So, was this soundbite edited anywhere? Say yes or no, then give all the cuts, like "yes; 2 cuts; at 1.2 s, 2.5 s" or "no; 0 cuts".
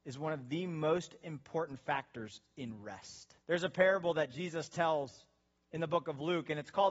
yes; 1 cut; at 3.4 s